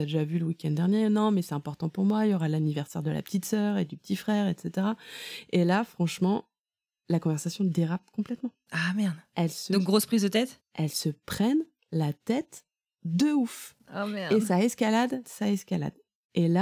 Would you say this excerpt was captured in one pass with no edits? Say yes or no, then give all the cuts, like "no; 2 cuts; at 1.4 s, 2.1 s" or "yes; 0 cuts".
no; 1 cut; at 15.2 s